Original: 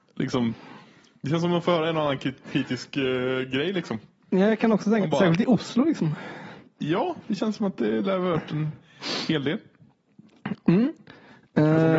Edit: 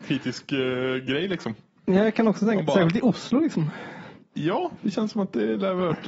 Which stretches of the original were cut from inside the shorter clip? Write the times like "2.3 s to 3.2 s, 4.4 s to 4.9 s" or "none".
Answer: none